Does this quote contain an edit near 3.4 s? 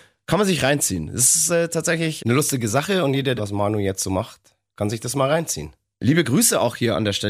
yes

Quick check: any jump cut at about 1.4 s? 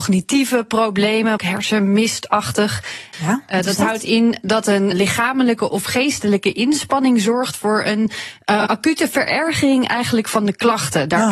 yes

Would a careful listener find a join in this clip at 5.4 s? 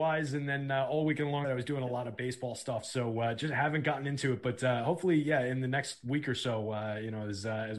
no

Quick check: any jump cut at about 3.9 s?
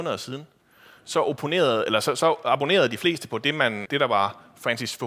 yes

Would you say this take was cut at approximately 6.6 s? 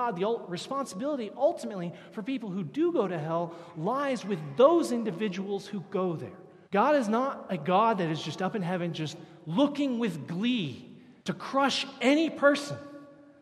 yes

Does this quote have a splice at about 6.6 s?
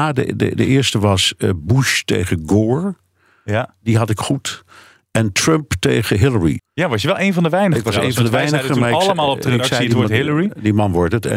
yes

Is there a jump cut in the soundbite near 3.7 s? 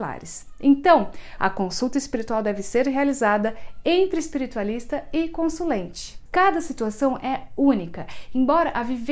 no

